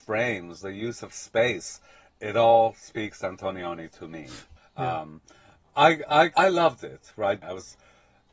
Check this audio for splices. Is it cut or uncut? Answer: cut